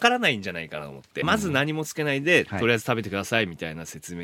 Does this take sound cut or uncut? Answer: cut